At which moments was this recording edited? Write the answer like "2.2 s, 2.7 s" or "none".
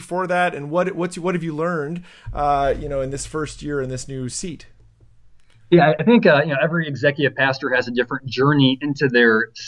none